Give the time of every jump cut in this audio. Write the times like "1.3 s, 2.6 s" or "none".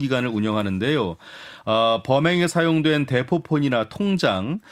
none